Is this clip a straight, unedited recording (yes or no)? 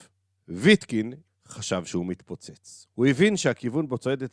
no